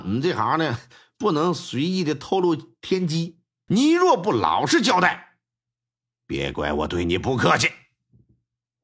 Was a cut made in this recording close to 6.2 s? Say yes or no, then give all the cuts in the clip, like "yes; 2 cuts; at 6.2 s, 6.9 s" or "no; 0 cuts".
no; 1 cut; at 3.7 s